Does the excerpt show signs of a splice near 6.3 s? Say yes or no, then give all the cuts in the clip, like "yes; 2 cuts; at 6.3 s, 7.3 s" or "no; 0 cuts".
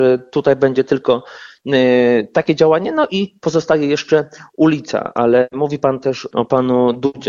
yes; 1 cut; at 6.3 s